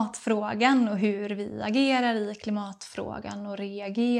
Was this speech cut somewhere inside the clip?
no; 0 cuts

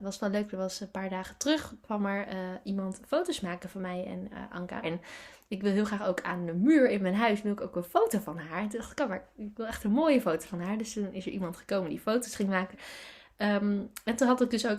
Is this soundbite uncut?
no; 2 cuts; at 4.8 s, 12.7 s

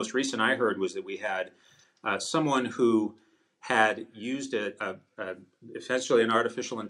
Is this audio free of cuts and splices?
yes; 0 cuts

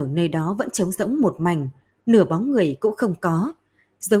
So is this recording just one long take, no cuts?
yes; 0 cuts

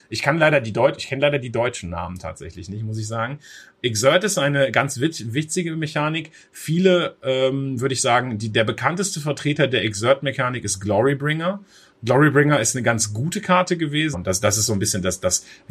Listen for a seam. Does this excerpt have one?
yes; 1 cut; at 14.1 s

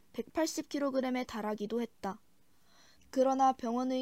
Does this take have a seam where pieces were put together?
yes; 1 cut; at 3.0 s

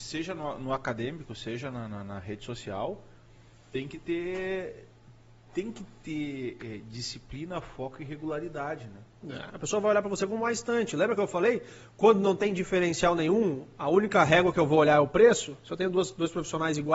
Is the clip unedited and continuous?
no; 1 cut; at 9.5 s

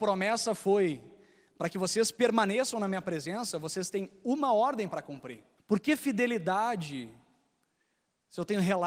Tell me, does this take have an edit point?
yes; 1 cut; at 5.6 s

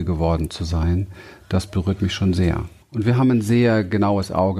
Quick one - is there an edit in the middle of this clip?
yes; 1 cut; at 2.8 s

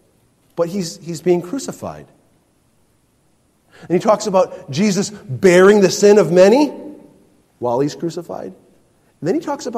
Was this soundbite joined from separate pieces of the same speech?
no; 0 cuts

